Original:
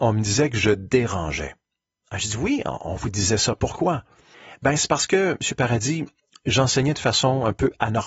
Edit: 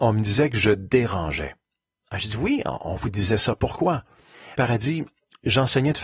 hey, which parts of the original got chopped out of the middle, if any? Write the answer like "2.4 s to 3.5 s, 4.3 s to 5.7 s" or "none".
4.6 s to 5.6 s